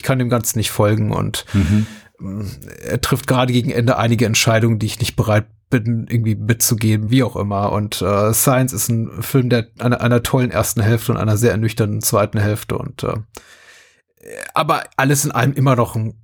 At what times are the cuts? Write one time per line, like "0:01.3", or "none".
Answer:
0:07.1